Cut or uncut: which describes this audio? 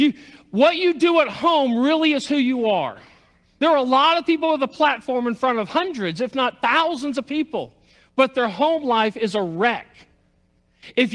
uncut